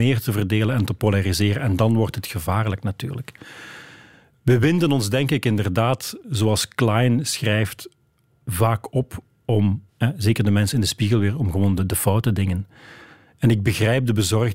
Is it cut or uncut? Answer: cut